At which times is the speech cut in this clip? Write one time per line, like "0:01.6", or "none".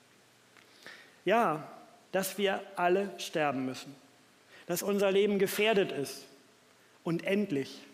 0:02.0